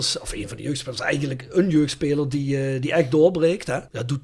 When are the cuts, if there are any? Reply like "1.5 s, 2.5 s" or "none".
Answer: none